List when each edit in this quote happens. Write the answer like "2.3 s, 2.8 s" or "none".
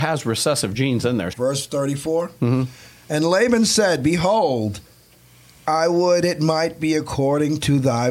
1.3 s